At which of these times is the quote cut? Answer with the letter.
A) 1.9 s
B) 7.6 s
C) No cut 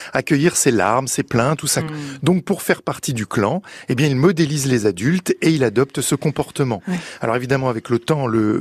A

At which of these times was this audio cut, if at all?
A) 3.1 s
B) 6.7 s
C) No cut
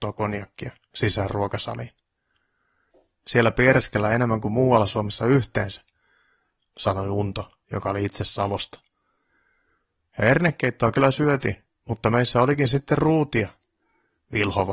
A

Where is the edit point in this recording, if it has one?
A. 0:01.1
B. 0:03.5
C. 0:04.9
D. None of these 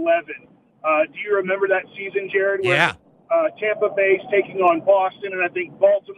D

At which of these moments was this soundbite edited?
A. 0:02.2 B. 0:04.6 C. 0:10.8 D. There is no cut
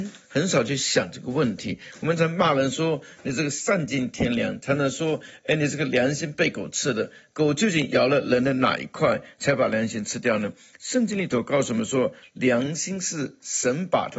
A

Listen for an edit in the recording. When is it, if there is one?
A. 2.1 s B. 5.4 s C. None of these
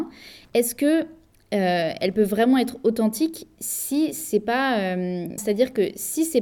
B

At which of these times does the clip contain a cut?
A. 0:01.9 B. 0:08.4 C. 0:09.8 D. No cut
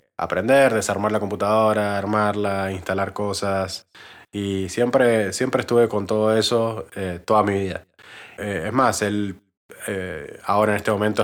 B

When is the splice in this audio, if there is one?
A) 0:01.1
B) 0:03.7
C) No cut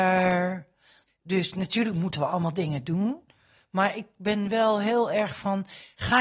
A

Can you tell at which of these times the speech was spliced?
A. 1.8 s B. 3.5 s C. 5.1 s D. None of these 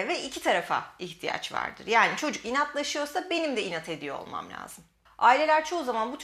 C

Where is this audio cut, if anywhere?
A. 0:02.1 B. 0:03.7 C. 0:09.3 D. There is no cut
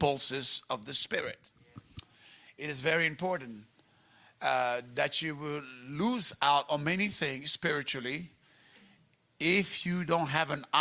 D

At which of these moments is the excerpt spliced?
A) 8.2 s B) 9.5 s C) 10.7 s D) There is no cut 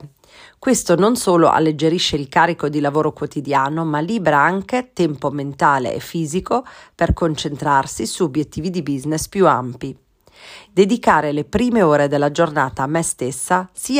C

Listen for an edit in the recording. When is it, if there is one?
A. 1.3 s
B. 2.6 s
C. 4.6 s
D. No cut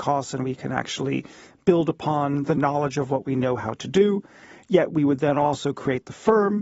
D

